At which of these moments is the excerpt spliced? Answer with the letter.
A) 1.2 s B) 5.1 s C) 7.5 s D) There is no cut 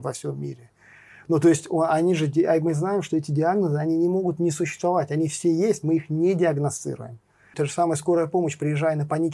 C